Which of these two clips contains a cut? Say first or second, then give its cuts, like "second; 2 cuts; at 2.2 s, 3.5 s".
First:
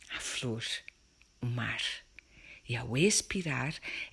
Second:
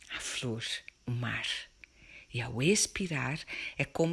second; 1 cut; at 1.0 s